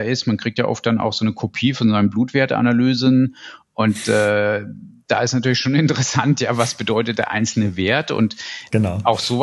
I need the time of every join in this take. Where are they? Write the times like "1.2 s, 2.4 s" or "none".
none